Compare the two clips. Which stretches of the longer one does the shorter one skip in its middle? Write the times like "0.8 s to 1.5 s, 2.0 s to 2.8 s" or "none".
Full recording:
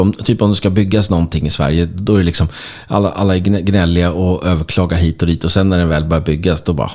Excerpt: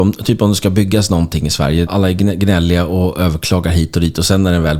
1.9 s to 3.1 s